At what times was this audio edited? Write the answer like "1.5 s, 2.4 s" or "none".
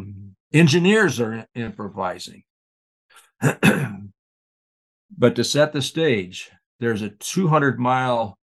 none